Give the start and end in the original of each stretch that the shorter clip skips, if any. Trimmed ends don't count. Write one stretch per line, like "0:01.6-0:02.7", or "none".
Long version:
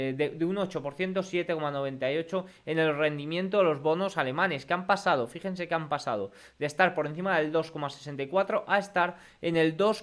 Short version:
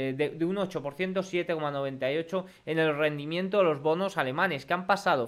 none